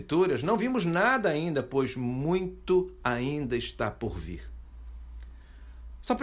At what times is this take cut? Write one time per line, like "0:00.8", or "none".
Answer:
none

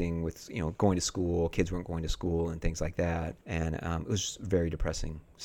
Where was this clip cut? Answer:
0:03.4

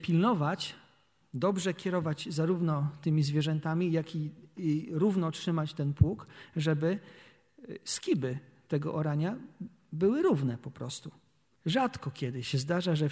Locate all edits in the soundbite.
0:11.5

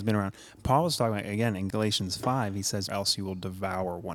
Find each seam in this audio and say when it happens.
0:01.7
0:02.9

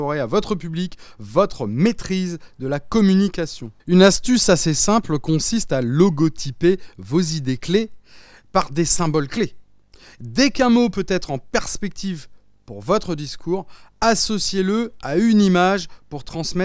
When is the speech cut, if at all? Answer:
0:03.8

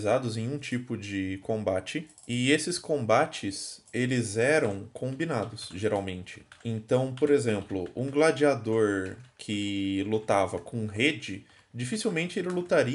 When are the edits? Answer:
none

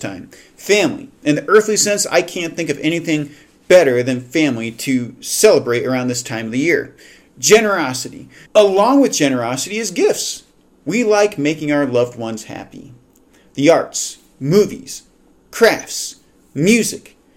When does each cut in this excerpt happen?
0:08.5

